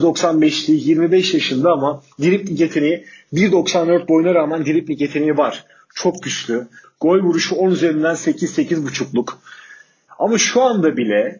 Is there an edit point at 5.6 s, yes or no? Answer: no